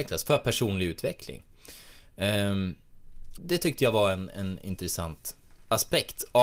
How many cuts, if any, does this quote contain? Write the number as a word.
one